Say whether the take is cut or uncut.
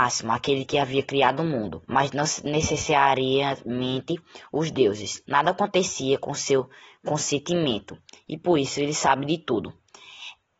cut